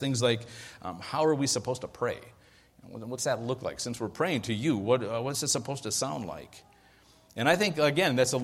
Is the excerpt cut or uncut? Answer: uncut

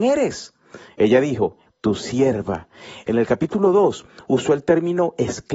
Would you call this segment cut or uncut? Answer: cut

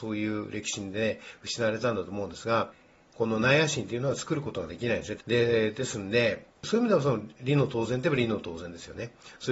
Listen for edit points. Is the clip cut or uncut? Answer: cut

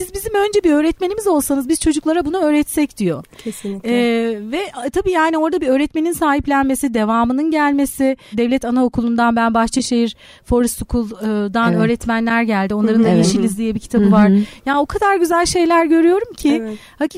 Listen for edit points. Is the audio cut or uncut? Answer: cut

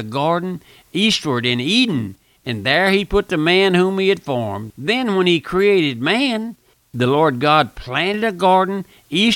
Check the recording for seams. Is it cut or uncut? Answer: cut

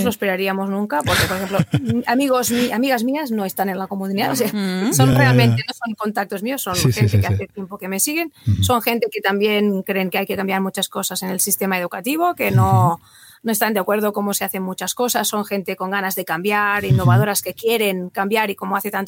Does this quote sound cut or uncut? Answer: uncut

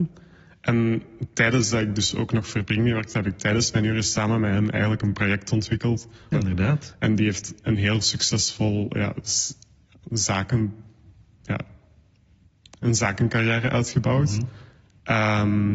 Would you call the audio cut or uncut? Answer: cut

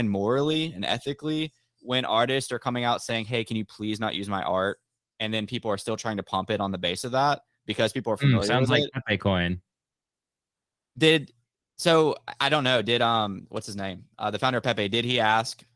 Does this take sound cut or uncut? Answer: uncut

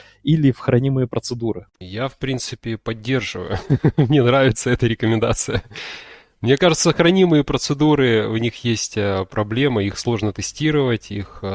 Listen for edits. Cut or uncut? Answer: uncut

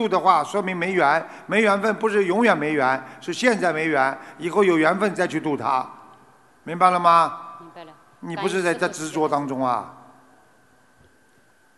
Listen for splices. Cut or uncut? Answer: uncut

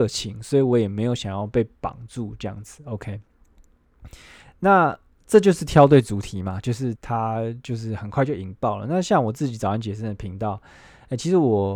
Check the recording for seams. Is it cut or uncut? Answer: cut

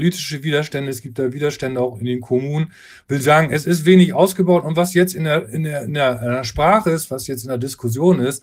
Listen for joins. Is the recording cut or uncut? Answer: uncut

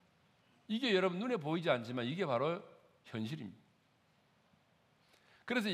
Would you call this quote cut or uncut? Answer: uncut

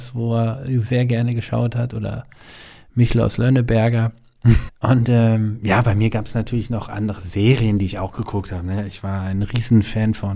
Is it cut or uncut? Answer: cut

